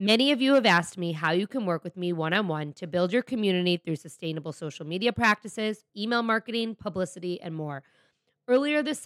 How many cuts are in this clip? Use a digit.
1